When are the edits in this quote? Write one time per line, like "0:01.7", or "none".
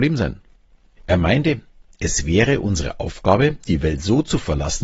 0:01.0